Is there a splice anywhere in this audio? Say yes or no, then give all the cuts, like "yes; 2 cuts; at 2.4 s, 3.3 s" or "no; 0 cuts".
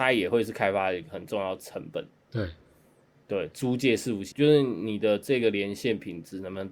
yes; 1 cut; at 4.3 s